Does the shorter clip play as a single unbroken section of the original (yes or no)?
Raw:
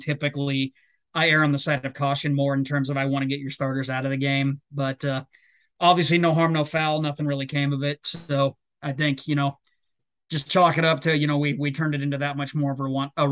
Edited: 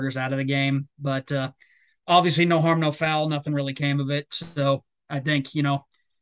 yes